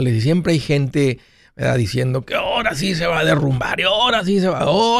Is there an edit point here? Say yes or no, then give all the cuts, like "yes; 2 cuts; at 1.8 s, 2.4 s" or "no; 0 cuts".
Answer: no; 0 cuts